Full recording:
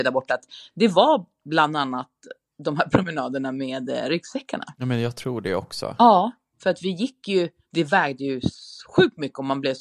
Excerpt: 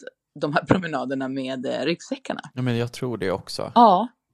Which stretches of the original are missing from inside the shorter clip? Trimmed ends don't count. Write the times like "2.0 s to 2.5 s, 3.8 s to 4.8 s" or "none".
none